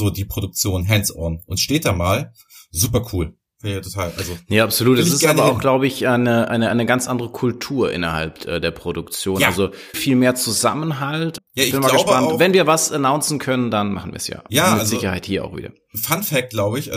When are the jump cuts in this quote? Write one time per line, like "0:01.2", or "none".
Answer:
0:09.9
0:11.4